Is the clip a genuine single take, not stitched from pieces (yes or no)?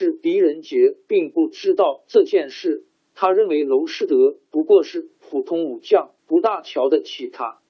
no